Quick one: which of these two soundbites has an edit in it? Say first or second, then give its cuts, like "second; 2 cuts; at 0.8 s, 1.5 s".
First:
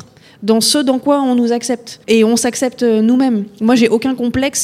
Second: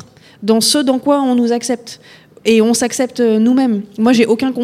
first; 1 cut; at 2.0 s